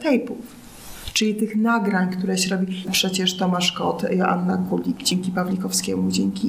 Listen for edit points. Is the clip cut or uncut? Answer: cut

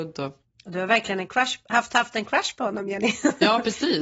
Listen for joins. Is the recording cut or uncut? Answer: uncut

